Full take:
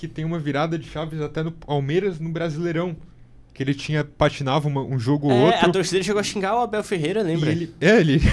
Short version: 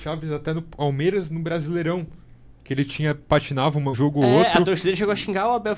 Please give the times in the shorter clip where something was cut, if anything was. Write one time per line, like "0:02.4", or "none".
0:03.9